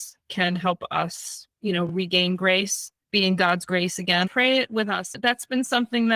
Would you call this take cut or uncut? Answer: cut